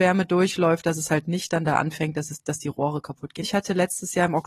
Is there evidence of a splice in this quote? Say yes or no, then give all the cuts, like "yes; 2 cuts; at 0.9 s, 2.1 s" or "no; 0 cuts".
yes; 1 cut; at 3.4 s